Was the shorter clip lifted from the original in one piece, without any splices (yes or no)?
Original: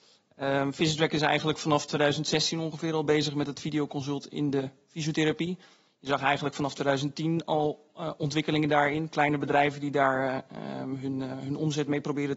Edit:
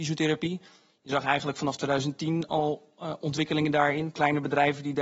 yes